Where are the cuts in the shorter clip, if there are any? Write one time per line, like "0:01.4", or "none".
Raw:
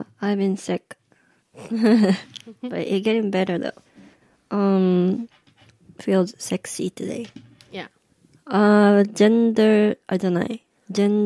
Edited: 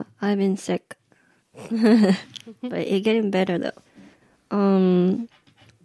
none